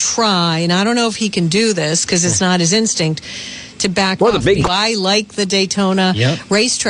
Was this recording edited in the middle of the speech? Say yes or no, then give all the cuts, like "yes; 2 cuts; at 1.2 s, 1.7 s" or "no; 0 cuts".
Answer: yes; 1 cut; at 4.7 s